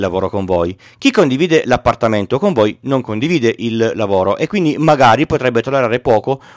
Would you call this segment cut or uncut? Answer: uncut